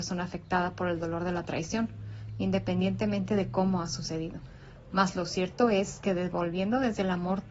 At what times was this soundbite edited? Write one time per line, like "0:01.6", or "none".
none